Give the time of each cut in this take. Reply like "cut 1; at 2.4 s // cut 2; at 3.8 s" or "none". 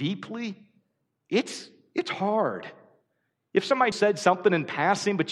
cut 1; at 3.9 s